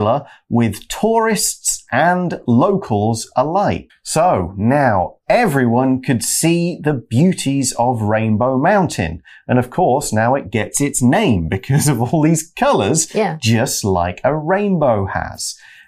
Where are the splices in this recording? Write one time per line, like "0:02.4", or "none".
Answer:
0:03.9